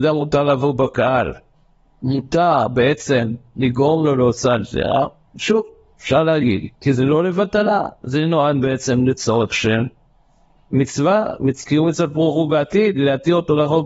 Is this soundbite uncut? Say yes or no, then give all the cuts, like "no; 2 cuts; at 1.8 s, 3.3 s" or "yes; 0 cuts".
yes; 0 cuts